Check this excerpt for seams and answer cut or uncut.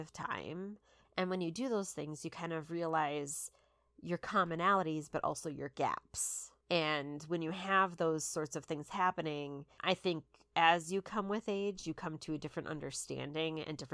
cut